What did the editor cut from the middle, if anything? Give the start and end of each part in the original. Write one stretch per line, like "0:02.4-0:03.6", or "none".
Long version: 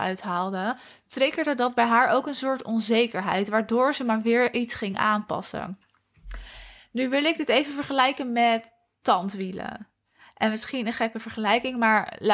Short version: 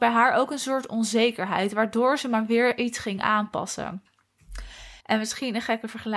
0:06.8-0:10.3